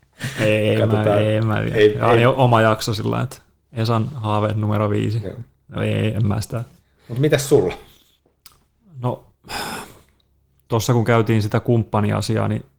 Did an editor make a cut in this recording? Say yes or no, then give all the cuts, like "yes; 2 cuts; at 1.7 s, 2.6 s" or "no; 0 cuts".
no; 0 cuts